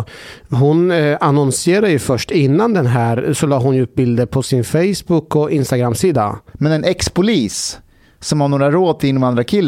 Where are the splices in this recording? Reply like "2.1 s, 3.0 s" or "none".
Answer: 6.5 s